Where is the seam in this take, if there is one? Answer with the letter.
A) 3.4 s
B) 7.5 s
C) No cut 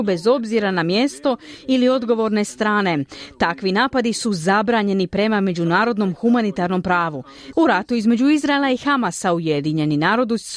B